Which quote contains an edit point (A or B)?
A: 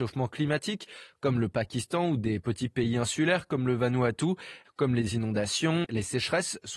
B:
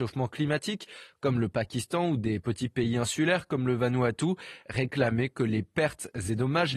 A